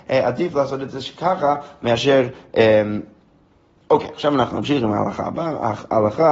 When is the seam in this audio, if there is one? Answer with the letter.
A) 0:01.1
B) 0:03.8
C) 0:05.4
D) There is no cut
B